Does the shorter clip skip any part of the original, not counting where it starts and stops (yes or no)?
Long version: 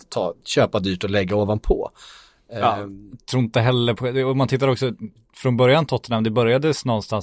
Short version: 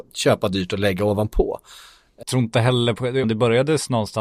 yes